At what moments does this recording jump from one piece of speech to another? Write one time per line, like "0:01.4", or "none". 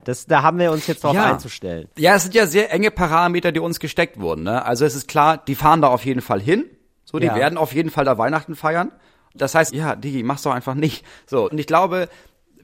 0:01.9
0:09.7
0:11.5